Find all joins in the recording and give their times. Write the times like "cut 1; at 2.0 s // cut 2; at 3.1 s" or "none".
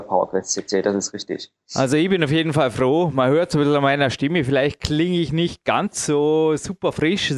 none